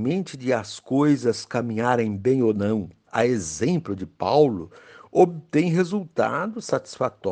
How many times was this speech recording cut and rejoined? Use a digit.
1